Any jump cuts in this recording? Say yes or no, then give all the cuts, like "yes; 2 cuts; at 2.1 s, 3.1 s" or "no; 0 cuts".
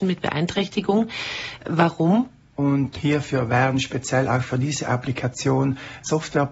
yes; 1 cut; at 2.5 s